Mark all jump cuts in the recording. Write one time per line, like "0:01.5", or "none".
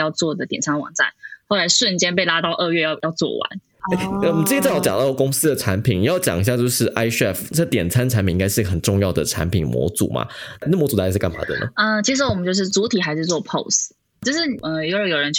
none